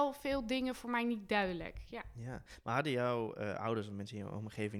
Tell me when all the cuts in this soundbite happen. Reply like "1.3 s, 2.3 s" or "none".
none